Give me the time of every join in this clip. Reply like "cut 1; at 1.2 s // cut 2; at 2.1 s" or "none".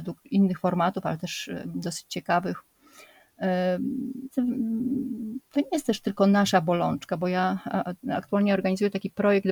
cut 1; at 4.3 s